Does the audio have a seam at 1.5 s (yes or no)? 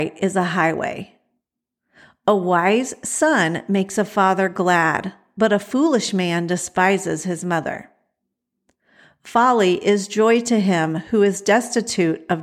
no